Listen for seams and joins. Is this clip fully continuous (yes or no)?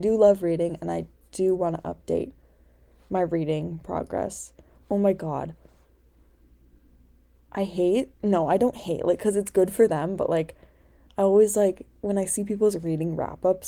no